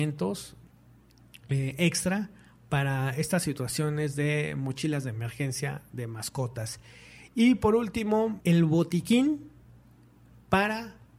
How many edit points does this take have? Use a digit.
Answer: 1